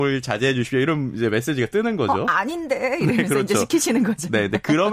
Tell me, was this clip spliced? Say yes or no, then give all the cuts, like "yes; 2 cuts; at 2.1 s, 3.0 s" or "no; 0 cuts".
no; 0 cuts